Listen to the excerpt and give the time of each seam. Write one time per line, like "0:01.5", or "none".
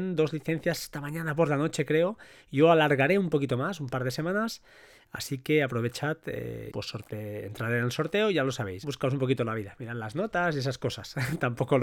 0:06.7
0:08.8